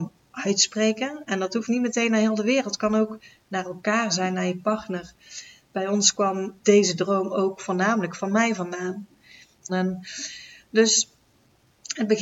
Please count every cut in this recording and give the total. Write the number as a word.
two